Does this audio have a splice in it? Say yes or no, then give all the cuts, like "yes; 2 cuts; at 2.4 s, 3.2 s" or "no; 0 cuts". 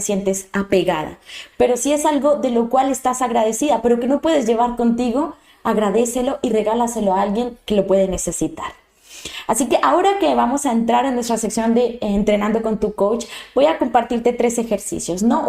yes; 1 cut; at 1.5 s